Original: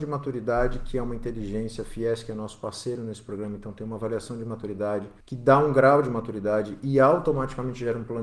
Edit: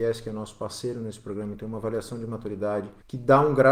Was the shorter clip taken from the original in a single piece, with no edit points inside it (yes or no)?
no